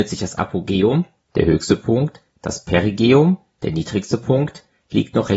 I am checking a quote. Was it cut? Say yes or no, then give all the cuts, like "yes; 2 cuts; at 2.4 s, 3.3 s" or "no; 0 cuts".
yes; 1 cut; at 2.3 s